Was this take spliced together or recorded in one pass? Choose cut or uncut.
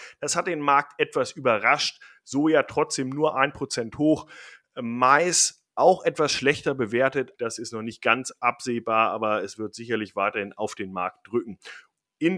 cut